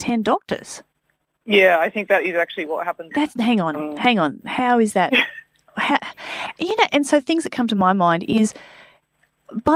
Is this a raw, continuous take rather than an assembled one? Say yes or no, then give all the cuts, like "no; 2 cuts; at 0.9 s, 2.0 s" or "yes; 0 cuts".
no; 2 cuts; at 3.1 s, 6.9 s